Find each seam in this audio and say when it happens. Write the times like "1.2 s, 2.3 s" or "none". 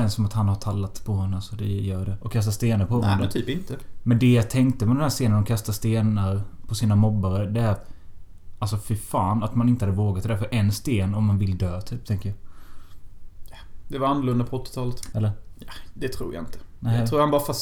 2.2 s, 15.1 s